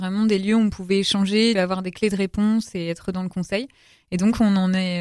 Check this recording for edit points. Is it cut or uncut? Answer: cut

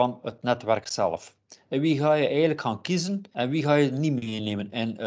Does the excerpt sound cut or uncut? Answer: uncut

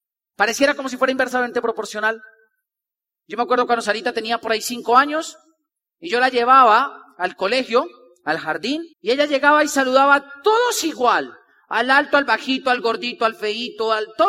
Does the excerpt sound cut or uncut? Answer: cut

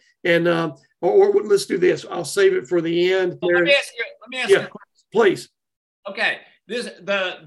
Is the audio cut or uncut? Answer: cut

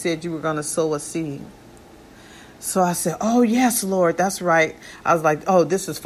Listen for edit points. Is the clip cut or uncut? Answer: uncut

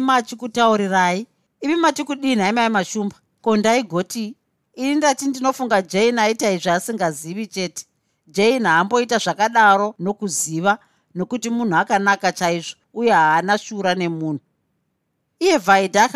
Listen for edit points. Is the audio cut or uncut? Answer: cut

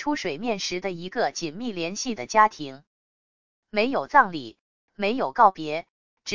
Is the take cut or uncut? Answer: uncut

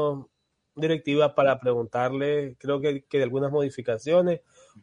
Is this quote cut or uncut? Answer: uncut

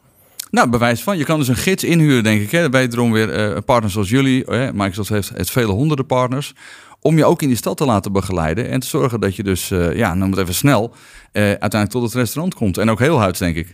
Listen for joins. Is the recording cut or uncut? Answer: uncut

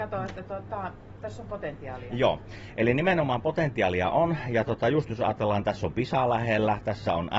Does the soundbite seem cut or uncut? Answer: uncut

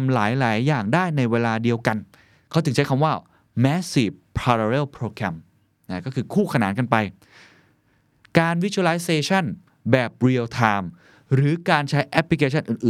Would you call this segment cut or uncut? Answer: uncut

